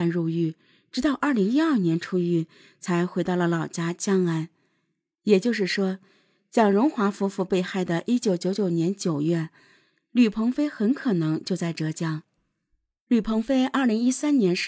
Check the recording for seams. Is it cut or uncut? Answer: uncut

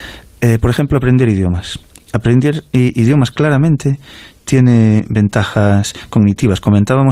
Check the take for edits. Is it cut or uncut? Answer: uncut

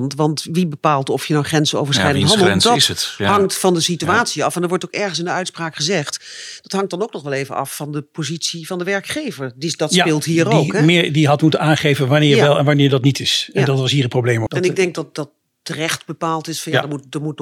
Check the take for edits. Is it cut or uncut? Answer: cut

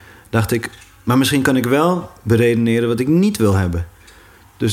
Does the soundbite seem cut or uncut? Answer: uncut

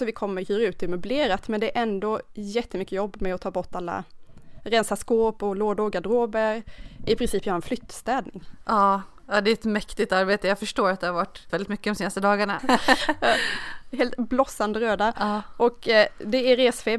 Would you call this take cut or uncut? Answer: cut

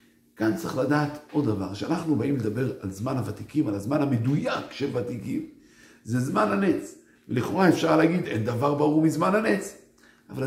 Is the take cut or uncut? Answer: uncut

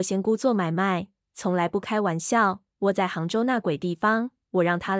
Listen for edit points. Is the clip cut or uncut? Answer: cut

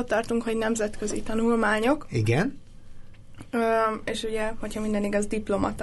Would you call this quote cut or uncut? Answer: uncut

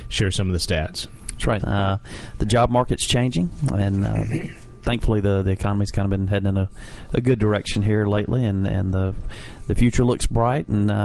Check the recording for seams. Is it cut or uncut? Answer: cut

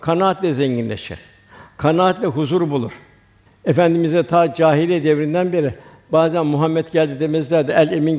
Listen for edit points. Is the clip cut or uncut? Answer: cut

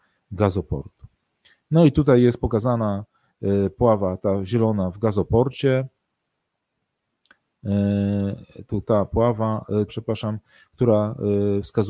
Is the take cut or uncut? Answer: cut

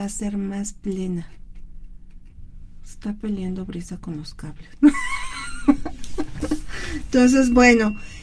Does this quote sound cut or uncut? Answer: uncut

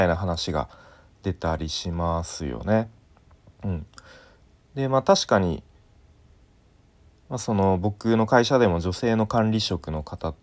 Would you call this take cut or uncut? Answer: uncut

